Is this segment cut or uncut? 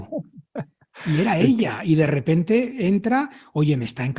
uncut